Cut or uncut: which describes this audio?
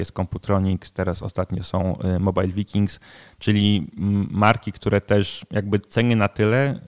uncut